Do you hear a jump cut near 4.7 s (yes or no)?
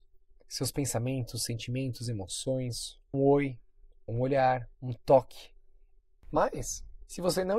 yes